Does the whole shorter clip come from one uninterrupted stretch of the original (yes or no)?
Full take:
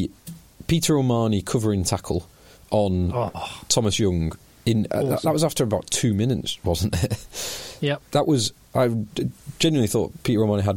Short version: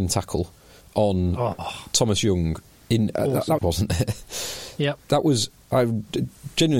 no